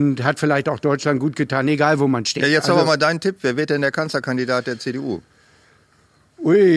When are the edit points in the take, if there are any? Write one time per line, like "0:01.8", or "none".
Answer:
none